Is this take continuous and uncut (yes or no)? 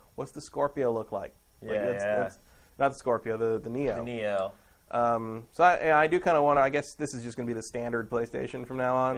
yes